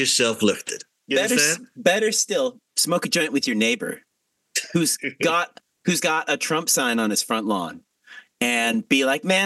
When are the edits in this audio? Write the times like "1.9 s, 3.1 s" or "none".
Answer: 2.7 s